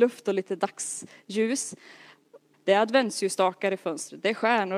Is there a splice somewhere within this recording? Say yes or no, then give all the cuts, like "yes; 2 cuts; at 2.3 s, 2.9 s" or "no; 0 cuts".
yes; 1 cut; at 2.5 s